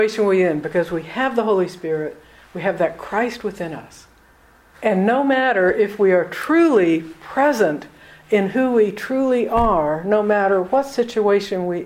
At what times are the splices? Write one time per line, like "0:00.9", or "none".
0:04.7